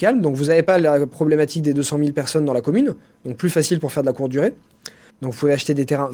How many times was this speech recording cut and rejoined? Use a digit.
1